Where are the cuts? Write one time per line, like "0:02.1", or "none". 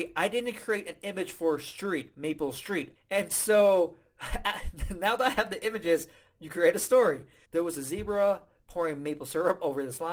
0:02.9
0:07.4